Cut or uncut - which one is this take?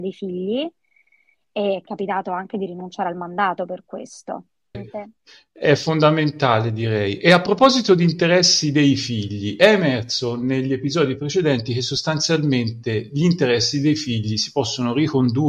cut